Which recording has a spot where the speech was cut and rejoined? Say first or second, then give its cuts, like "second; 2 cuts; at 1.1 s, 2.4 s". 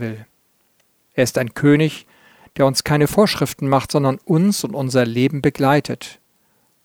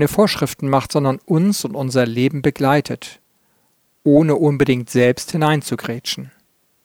first; 1 cut; at 1.0 s